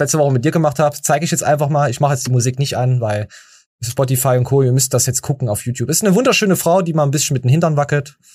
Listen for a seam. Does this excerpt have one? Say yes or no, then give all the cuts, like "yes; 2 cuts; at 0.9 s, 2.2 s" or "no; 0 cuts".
no; 0 cuts